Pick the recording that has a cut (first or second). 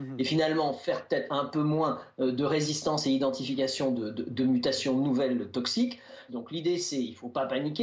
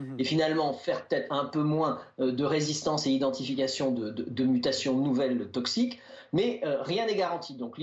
first